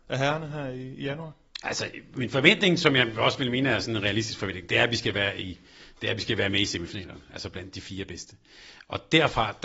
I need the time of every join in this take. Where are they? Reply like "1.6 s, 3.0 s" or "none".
none